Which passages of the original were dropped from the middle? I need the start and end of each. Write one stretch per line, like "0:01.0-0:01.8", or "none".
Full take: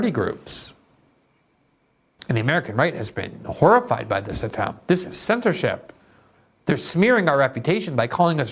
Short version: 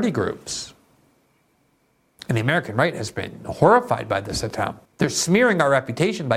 0:04.9-0:06.5